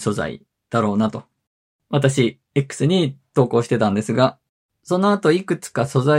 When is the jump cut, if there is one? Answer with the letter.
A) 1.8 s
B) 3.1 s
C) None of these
A